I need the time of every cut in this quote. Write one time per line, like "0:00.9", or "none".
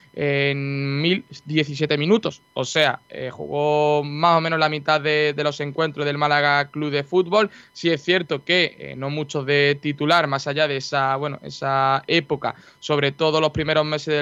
none